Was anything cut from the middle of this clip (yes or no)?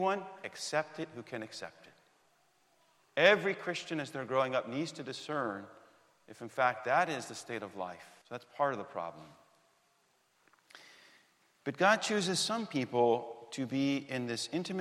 yes